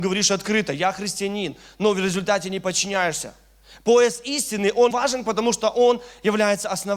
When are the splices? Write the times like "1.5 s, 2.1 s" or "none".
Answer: 4.9 s